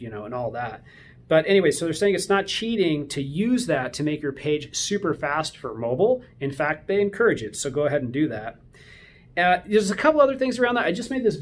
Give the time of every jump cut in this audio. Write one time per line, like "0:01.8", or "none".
none